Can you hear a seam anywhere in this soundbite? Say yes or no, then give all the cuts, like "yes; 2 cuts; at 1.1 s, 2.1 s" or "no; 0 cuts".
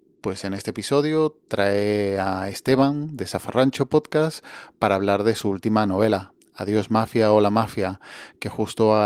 no; 0 cuts